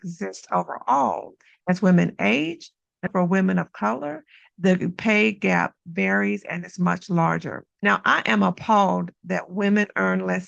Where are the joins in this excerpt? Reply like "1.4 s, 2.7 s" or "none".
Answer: 3.1 s, 7.8 s